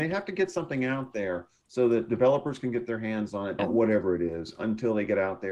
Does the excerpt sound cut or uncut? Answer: cut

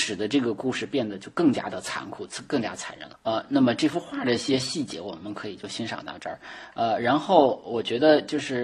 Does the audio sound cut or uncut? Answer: cut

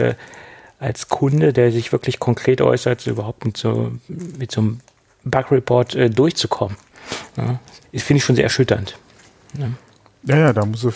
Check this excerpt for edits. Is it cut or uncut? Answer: cut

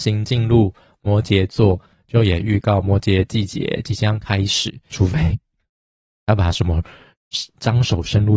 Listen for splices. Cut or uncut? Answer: cut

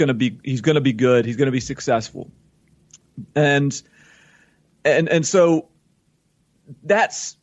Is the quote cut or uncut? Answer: uncut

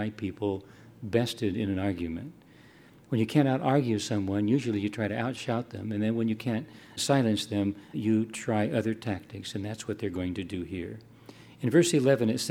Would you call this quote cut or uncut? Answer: cut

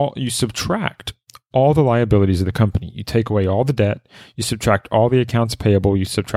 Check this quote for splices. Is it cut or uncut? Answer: uncut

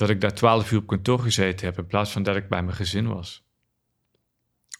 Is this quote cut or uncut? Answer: uncut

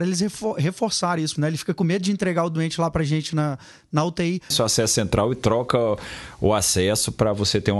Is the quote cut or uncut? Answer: cut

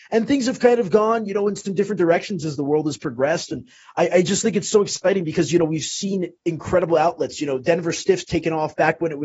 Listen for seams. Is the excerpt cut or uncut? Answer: uncut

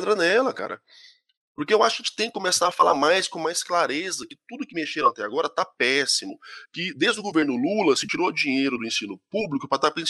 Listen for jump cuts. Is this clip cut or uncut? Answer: uncut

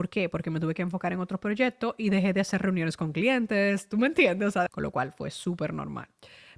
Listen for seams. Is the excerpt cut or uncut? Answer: cut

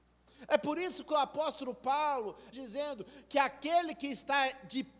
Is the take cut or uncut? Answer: cut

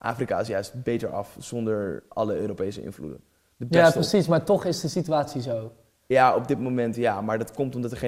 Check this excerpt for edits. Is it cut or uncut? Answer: uncut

